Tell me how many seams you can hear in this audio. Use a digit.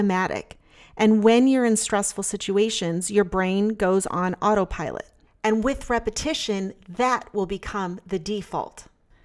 1